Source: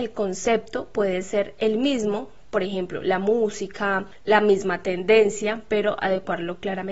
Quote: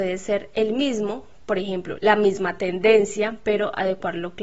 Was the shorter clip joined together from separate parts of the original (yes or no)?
yes